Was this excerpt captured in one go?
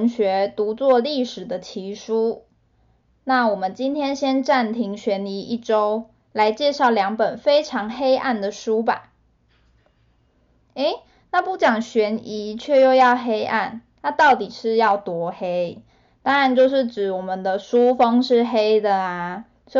yes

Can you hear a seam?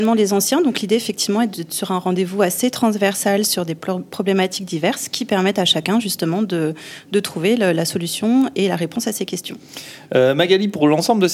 no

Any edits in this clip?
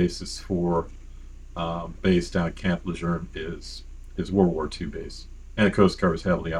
yes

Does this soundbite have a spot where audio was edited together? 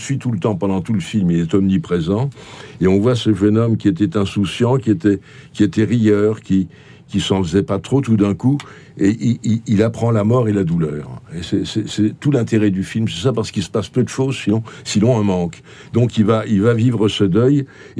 no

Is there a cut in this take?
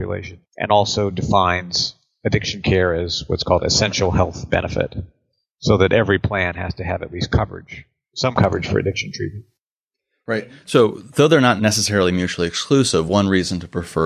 no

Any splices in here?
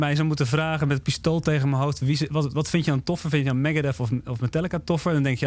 no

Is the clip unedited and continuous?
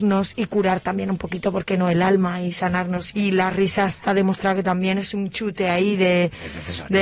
no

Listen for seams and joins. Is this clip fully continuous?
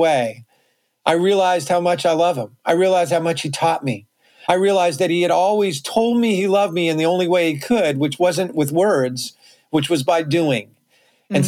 yes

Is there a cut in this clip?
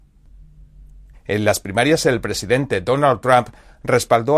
yes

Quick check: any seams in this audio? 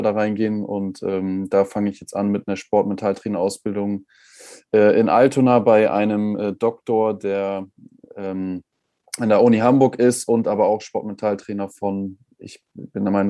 no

